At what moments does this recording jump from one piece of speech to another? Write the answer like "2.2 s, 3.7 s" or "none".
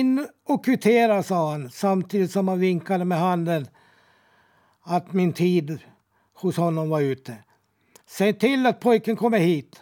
8.0 s